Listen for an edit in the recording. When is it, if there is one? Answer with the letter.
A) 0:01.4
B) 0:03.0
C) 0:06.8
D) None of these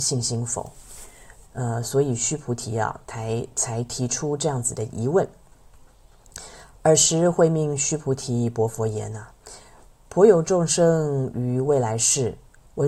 A